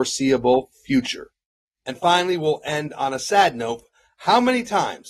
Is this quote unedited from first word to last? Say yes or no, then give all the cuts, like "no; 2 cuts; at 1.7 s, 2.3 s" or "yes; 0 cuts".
yes; 0 cuts